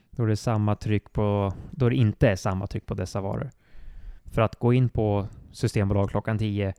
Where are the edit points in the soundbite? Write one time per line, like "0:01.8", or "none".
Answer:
0:04.2